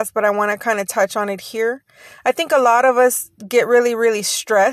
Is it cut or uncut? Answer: uncut